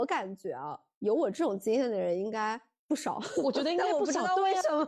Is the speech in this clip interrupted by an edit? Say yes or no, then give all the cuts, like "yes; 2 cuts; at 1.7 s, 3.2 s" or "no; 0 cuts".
no; 0 cuts